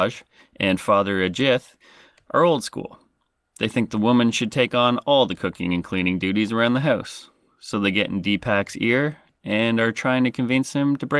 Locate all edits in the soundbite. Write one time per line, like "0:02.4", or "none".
none